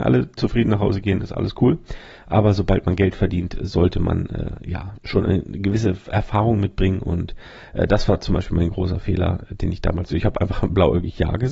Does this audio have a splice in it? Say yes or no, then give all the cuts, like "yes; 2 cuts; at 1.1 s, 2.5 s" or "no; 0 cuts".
no; 0 cuts